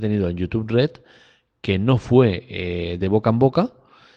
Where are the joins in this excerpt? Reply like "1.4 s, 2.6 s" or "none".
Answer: none

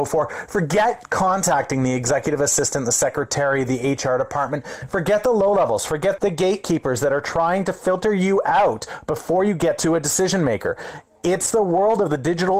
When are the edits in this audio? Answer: 6.2 s

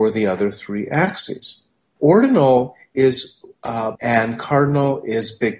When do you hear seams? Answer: 2.0 s, 4.0 s

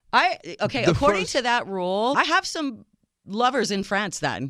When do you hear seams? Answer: 2.1 s

